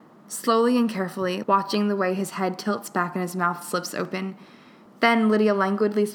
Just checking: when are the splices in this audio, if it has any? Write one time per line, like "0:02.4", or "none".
0:01.4
0:04.9